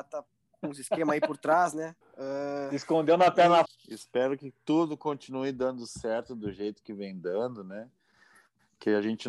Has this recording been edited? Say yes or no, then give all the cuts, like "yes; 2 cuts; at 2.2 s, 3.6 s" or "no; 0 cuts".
yes; 2 cuts; at 2.0 s, 3.6 s